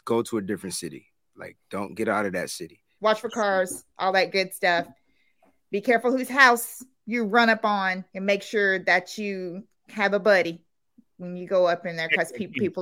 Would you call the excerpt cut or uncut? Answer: cut